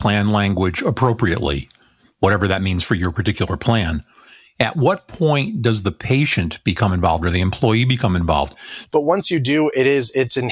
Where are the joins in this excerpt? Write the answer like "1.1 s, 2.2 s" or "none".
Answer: 8.9 s